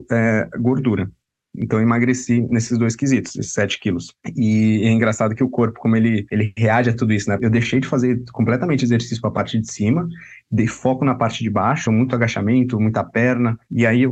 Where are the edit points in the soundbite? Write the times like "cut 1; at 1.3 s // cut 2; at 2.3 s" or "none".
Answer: cut 1; at 7.4 s // cut 2; at 11.9 s